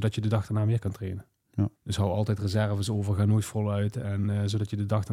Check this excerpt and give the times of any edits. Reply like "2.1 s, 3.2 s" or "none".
1.8 s